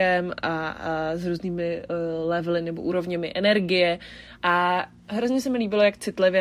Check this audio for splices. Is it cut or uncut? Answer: uncut